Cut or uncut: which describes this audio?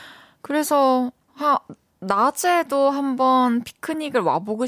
cut